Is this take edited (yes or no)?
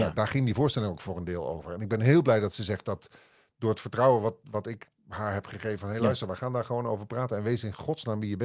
no